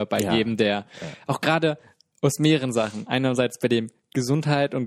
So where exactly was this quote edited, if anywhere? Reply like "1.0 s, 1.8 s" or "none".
none